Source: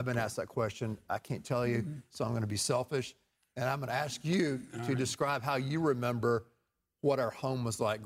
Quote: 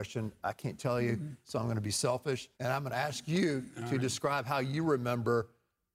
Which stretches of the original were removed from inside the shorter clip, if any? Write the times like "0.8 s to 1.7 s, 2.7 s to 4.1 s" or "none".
3.2 s to 3.5 s